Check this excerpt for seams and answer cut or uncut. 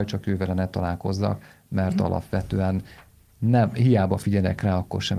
uncut